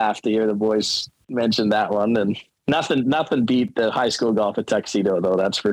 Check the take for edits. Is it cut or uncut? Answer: uncut